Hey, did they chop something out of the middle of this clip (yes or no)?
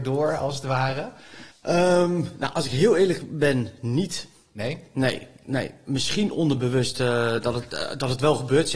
yes